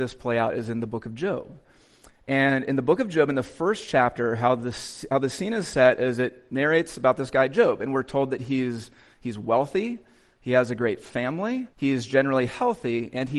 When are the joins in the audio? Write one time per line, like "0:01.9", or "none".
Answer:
0:11.7